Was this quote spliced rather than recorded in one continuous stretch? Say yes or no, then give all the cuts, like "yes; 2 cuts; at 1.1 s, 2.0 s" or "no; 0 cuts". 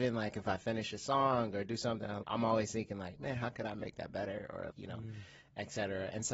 yes; 2 cuts; at 2.2 s, 4.7 s